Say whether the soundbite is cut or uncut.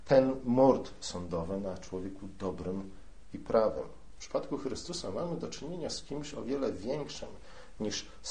cut